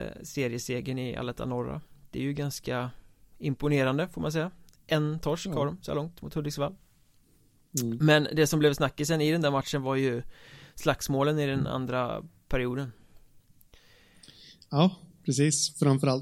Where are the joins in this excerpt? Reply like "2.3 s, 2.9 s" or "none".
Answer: none